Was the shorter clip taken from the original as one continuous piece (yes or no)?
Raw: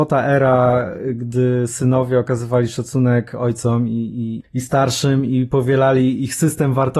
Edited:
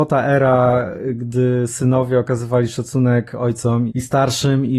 no